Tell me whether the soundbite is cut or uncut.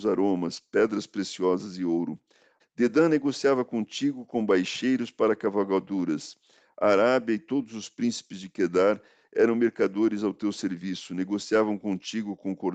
cut